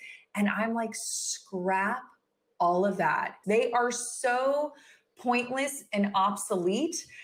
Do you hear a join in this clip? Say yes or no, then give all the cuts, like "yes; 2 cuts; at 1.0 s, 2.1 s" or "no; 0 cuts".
yes; 1 cut; at 3.4 s